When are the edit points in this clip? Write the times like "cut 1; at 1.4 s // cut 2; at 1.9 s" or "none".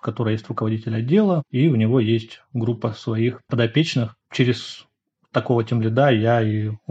cut 1; at 1.5 s